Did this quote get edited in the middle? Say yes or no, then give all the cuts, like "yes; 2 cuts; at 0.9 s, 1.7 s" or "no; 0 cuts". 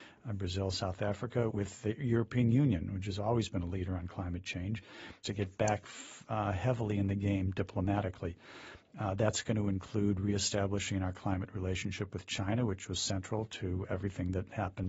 yes; 2 cuts; at 1.5 s, 5.2 s